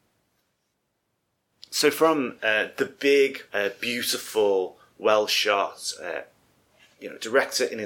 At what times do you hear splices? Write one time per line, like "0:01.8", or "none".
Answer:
0:03.5